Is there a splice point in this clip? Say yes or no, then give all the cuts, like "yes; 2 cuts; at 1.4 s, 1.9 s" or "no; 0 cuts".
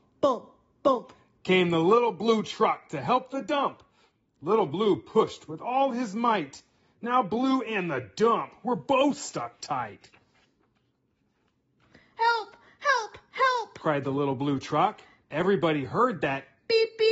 yes; 1 cut; at 15.2 s